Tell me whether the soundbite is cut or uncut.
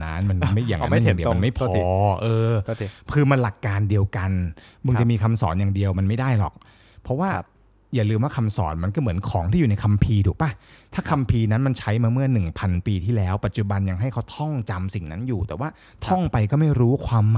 uncut